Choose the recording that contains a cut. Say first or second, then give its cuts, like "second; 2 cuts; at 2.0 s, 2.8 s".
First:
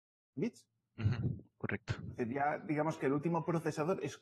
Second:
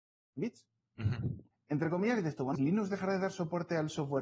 second; 2 cuts; at 1.5 s, 2.6 s